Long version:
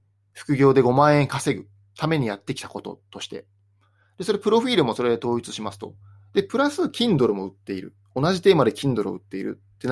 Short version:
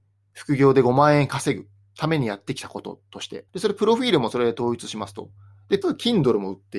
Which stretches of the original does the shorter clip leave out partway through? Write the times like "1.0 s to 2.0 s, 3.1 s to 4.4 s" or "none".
3.5 s to 4.1 s, 6.5 s to 6.8 s